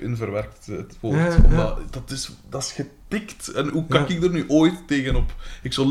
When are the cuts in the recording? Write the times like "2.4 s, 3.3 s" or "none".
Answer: none